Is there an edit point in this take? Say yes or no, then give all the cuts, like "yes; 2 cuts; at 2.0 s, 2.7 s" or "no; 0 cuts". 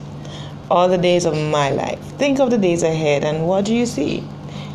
no; 0 cuts